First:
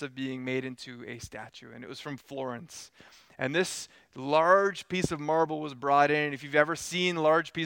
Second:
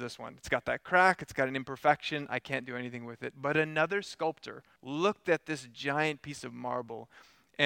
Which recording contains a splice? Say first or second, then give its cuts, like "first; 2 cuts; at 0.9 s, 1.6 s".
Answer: second; 1 cut; at 4.8 s